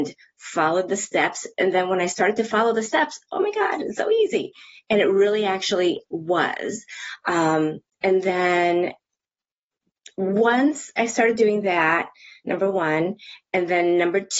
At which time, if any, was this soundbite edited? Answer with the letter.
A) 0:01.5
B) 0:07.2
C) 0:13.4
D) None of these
D